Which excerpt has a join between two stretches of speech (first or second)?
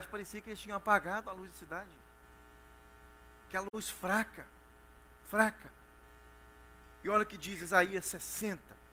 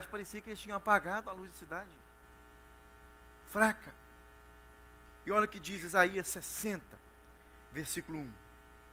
second